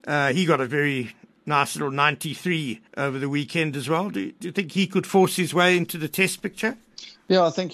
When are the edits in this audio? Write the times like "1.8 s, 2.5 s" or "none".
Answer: 2.9 s

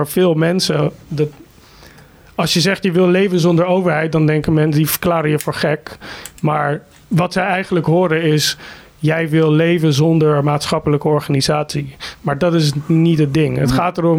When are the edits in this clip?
none

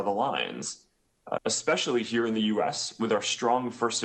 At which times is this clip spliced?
1.4 s

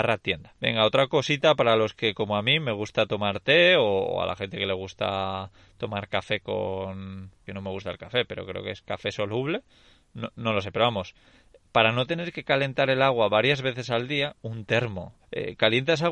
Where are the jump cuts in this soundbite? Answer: 15.2 s

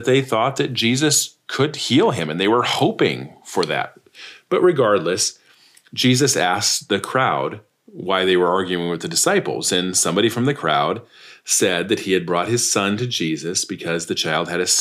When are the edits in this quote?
none

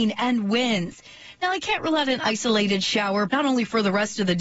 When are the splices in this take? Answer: 3.3 s

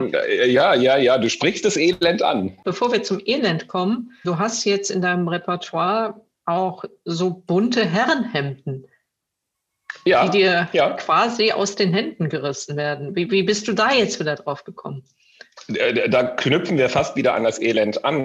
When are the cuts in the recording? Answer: 4.2 s

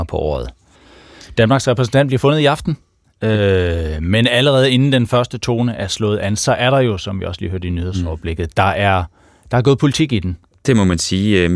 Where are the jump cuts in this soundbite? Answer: none

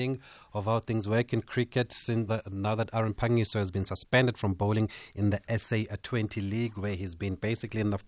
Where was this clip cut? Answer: 2.3 s

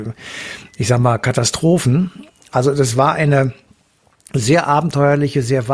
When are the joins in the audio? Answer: none

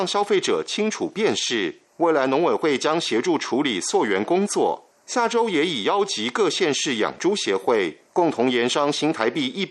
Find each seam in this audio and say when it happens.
none

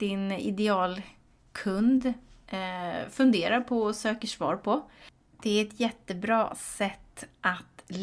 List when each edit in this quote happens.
none

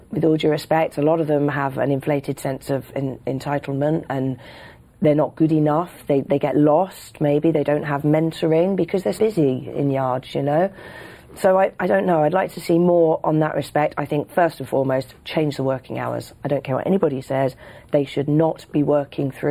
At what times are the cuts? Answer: 9.2 s

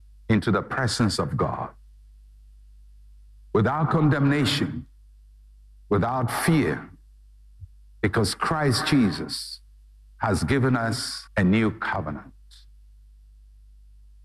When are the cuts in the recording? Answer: 11.3 s

